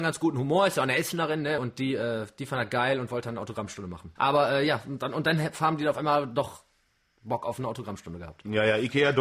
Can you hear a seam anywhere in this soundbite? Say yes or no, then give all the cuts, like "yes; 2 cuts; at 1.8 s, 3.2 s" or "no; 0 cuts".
yes; 2 cuts; at 1.6 s, 4.2 s